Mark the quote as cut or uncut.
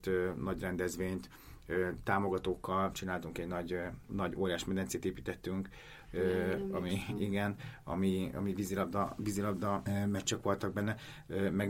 uncut